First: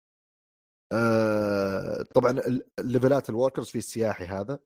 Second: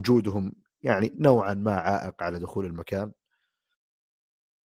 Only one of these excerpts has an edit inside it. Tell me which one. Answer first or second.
first